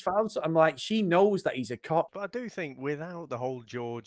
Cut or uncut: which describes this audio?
cut